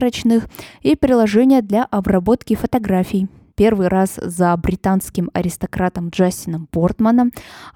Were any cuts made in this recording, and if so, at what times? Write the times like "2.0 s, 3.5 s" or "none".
3.5 s

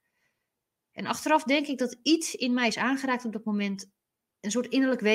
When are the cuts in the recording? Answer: none

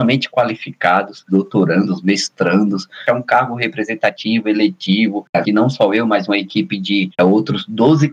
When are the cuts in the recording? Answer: 1.3 s, 5.4 s

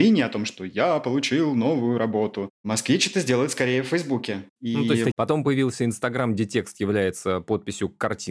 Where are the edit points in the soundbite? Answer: 5.1 s

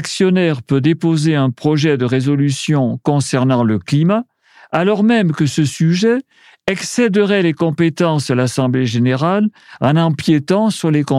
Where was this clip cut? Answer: none

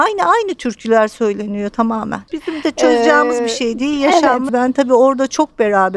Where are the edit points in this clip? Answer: 2.3 s, 4.5 s

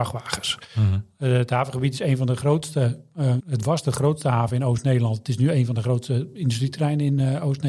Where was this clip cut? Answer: 3.4 s

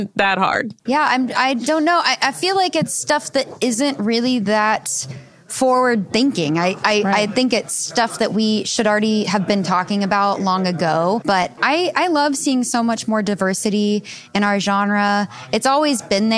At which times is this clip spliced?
7.9 s, 11.2 s

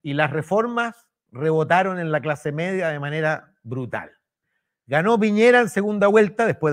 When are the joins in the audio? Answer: none

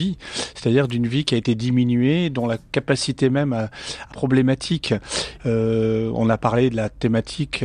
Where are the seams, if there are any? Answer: 4.1 s, 5.4 s

